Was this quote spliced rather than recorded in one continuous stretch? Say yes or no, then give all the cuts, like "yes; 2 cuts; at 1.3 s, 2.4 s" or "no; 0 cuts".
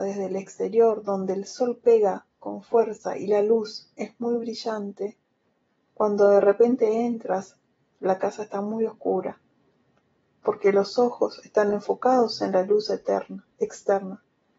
no; 0 cuts